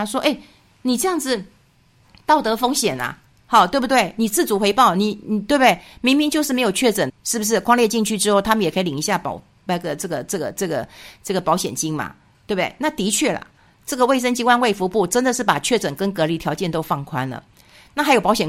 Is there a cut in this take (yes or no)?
yes